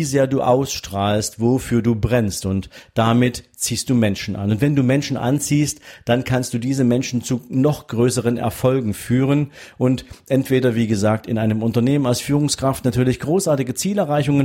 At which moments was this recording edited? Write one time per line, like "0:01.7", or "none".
none